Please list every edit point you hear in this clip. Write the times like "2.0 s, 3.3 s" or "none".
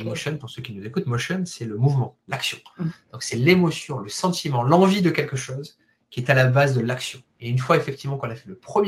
none